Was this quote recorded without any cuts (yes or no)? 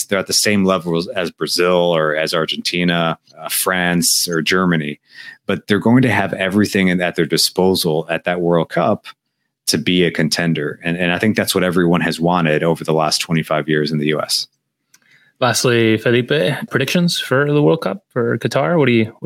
no